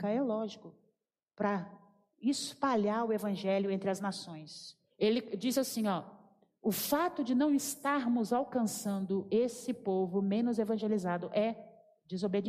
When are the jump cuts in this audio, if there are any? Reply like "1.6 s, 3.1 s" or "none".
4.9 s